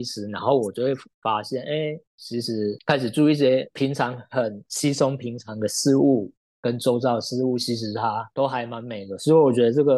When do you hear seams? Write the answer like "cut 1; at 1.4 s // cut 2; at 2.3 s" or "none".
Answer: none